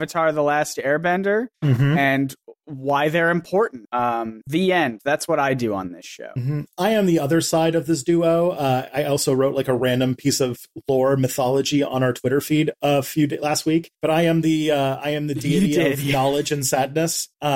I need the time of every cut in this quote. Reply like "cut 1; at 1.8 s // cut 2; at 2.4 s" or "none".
none

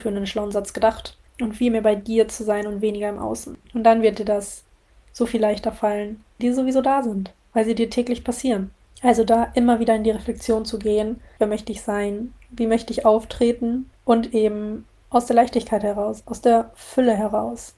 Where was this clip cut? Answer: cut 1; at 6.4 s // cut 2; at 11.4 s

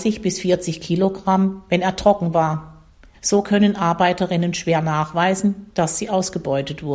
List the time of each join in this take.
cut 1; at 3.1 s

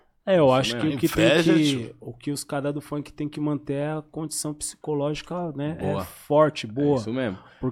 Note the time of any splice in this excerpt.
none

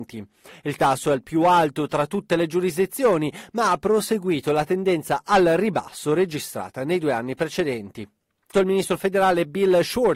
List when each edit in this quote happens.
cut 1; at 8.5 s

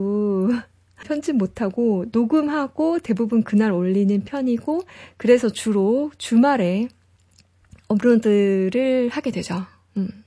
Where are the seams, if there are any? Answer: cut 1; at 1.0 s

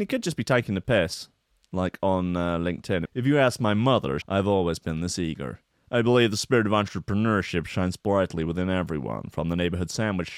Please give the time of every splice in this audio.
cut 1; at 3.0 s // cut 2; at 4.2 s

